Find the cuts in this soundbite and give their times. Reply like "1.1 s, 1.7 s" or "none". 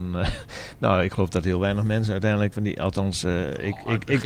2.5 s